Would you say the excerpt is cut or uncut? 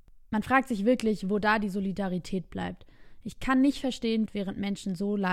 cut